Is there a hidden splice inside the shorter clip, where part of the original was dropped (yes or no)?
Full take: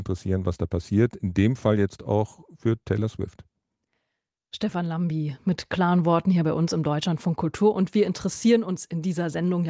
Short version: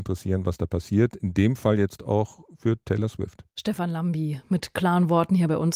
yes